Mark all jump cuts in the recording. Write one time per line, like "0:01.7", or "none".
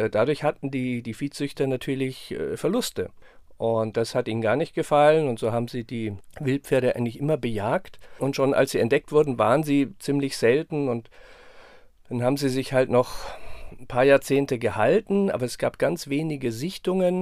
none